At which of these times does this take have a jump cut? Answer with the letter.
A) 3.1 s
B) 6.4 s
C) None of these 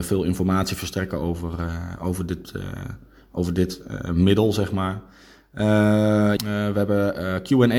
B